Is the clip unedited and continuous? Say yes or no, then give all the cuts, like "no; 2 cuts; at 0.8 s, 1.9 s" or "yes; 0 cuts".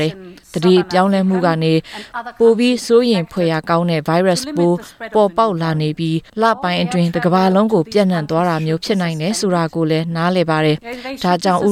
no; 1 cut; at 6.3 s